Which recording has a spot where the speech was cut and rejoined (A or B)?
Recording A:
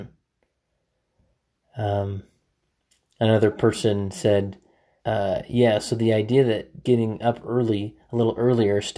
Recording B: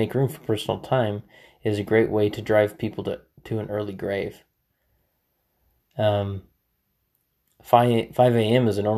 A